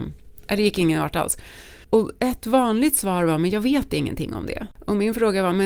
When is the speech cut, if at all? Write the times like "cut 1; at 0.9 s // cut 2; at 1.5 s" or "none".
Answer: cut 1; at 1.8 s

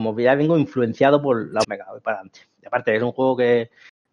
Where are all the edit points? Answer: cut 1; at 1.6 s

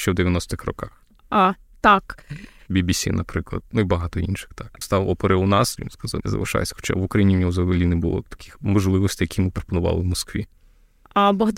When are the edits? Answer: cut 1; at 4.8 s // cut 2; at 6.2 s

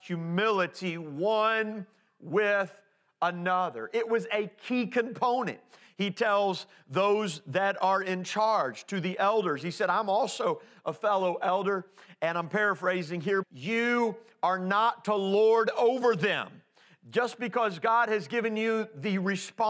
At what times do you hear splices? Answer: cut 1; at 13.4 s

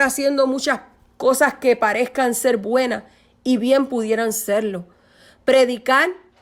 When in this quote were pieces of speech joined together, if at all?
none

